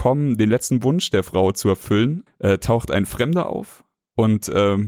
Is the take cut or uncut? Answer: cut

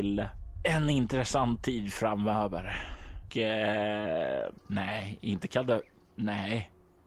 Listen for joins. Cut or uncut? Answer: cut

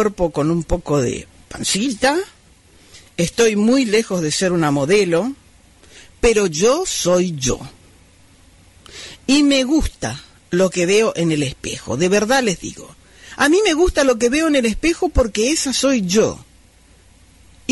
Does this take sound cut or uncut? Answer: uncut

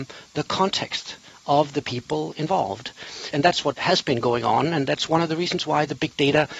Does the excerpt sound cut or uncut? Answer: cut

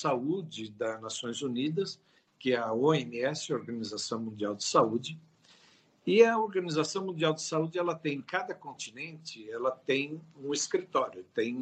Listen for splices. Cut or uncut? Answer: uncut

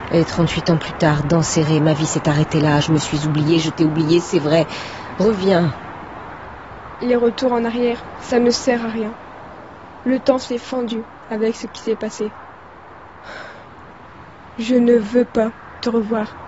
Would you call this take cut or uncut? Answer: uncut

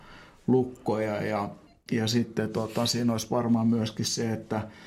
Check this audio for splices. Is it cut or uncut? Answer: uncut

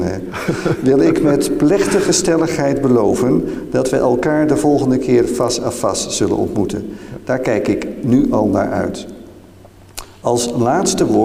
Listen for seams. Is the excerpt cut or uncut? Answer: uncut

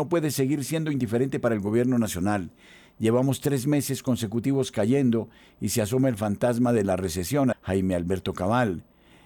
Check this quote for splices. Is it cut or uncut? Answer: cut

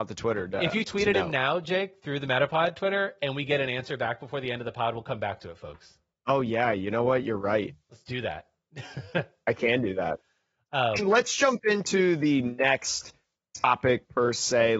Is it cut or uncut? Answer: cut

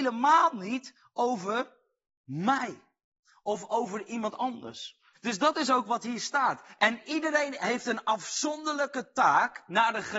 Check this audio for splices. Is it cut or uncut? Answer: cut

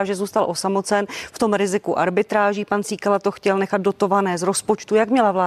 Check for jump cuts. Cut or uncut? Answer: uncut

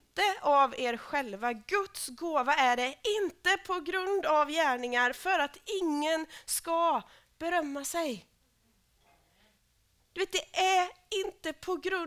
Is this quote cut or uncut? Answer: uncut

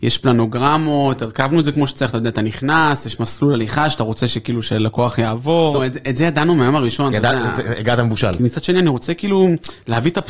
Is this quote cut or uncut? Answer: cut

